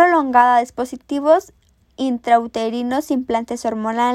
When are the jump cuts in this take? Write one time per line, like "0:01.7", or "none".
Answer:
none